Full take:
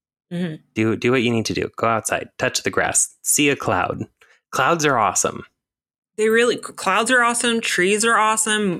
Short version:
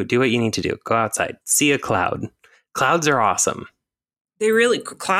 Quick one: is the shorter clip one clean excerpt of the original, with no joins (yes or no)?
no